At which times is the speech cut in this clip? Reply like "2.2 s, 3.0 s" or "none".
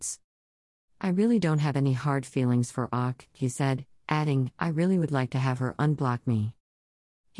none

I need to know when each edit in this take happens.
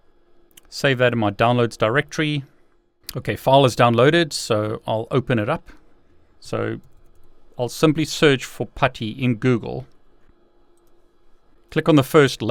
6.4 s

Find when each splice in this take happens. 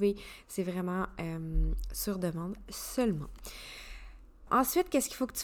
4.5 s

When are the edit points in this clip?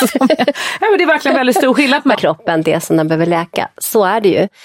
2.1 s

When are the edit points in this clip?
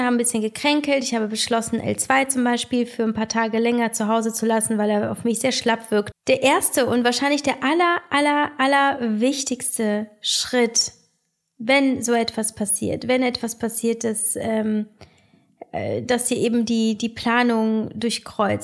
6.1 s

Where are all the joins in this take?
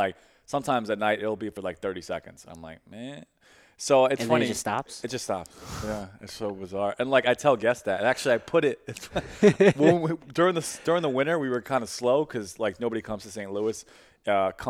none

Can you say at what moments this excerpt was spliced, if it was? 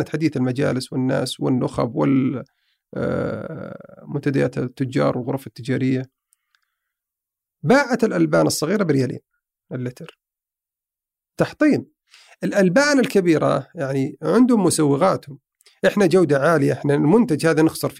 none

